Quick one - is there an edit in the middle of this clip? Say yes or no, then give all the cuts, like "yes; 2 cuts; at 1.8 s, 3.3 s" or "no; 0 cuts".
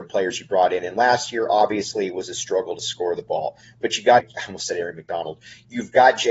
yes; 1 cut; at 4.2 s